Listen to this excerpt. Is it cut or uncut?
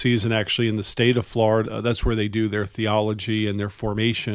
cut